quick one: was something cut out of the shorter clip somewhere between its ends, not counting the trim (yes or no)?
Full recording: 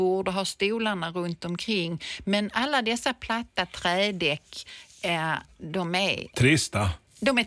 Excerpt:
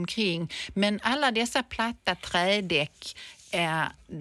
no